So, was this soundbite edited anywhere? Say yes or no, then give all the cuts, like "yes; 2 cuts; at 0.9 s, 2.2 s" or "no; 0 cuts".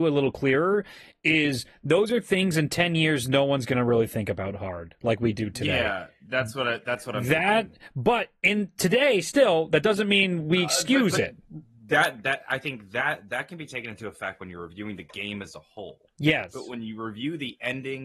no; 0 cuts